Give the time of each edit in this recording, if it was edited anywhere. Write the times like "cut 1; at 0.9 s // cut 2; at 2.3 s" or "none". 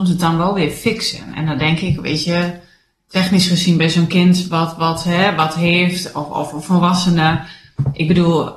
none